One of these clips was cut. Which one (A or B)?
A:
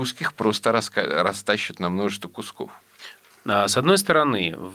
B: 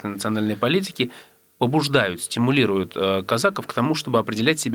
A